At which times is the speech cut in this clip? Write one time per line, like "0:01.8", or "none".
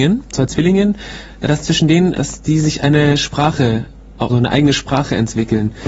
0:02.1
0:04.3

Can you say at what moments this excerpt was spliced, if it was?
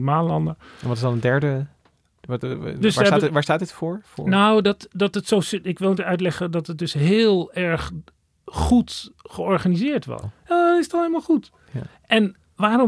0:06.0
0:10.2

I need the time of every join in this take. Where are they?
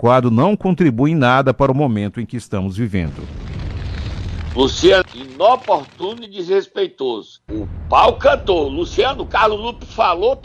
0:05.0
0:07.5

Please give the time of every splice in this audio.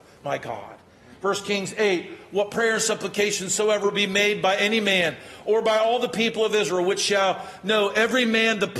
none

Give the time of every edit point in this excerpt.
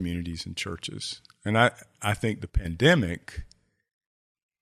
none

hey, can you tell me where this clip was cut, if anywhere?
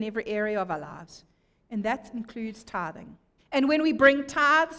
0:03.4

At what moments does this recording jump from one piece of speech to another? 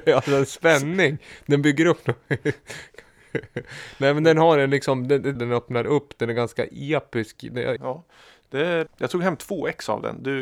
0:05.4
0:07.8
0:08.9

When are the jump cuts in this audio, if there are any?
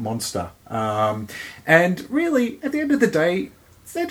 none

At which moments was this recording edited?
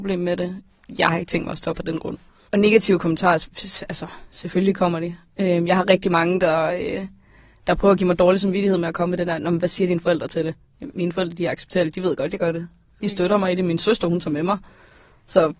none

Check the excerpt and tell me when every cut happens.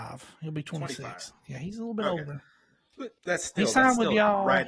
0:03.2

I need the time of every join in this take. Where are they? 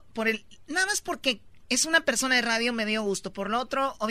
none

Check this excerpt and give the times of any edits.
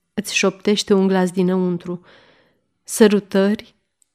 none

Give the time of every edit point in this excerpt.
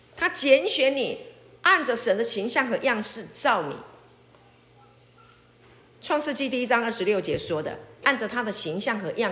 0:08.0

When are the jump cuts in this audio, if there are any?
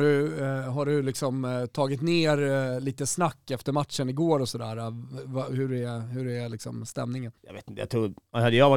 0:07.4

